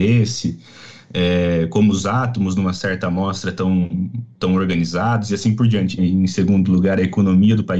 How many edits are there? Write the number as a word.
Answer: one